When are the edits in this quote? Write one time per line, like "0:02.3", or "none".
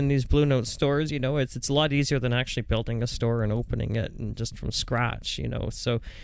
none